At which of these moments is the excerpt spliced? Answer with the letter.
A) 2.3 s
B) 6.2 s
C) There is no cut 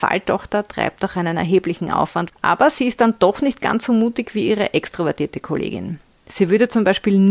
A